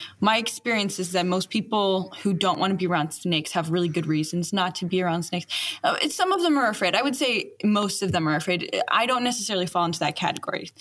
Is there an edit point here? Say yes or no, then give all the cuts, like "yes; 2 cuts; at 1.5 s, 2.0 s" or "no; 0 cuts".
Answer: no; 0 cuts